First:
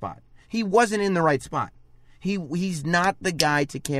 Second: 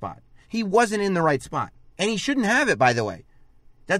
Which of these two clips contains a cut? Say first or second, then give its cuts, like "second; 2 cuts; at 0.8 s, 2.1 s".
second; 1 cut; at 1.8 s